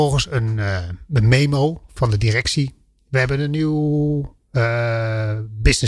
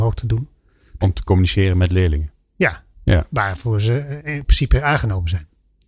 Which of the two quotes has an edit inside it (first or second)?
second